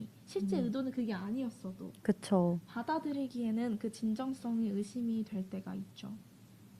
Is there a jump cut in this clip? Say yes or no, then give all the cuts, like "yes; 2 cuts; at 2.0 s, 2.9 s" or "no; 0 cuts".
no; 0 cuts